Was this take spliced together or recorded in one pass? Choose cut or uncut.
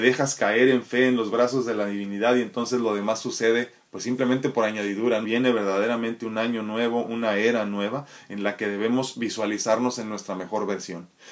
cut